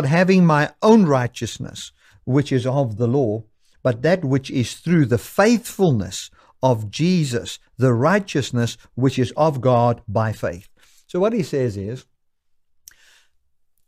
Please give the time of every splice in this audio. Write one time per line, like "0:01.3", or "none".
none